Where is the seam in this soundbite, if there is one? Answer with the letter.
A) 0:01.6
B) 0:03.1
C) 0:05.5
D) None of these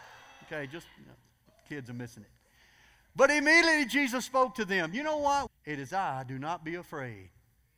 C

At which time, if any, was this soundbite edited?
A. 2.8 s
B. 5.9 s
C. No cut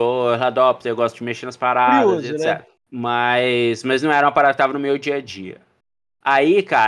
A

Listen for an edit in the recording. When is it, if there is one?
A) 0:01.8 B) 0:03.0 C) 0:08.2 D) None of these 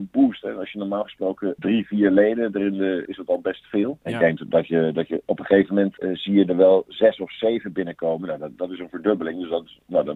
B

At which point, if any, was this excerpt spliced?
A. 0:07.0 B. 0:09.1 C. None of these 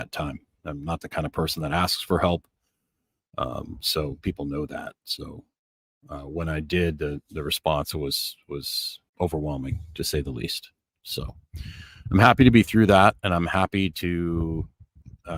B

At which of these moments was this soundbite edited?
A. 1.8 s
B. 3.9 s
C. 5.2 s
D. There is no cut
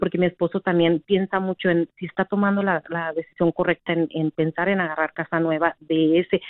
D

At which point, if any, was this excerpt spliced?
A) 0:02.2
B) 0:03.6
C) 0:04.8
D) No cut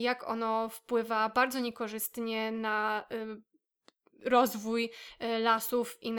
D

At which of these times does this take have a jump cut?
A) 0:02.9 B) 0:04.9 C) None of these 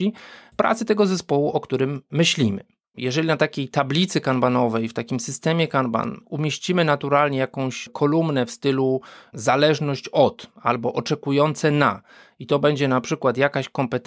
A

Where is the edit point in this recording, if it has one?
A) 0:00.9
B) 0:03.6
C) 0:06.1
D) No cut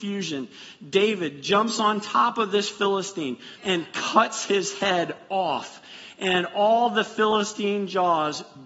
B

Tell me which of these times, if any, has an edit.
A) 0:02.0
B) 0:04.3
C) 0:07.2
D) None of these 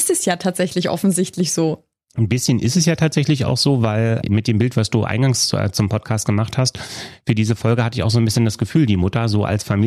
B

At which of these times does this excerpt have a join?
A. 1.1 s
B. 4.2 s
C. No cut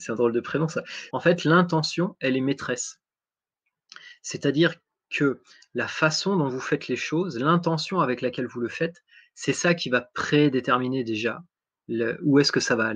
A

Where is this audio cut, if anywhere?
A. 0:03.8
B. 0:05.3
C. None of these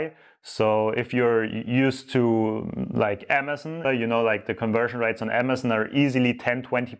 A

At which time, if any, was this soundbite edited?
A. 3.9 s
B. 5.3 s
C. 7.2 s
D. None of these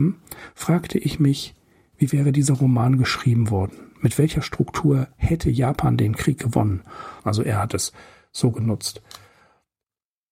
C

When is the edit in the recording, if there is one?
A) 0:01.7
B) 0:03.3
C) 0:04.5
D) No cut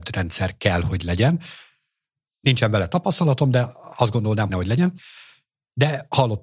C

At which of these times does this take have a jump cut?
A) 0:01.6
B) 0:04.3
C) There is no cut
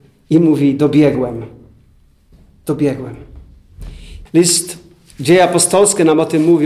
B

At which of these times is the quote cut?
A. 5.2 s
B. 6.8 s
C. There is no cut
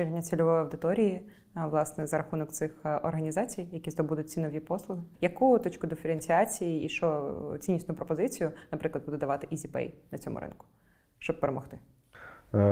A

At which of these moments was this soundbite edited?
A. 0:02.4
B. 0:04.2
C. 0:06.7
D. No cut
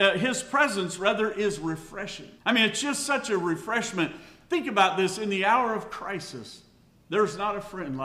A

